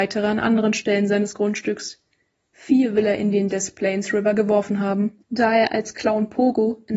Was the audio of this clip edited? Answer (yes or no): yes